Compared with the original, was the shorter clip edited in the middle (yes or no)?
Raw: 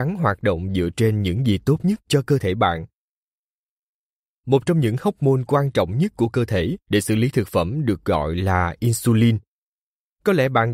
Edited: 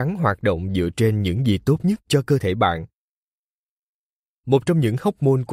no